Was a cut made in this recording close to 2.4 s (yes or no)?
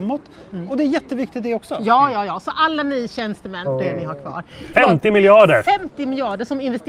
no